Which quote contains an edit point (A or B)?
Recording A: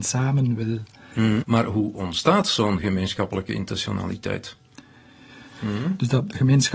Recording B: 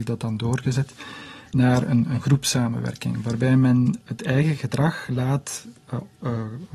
A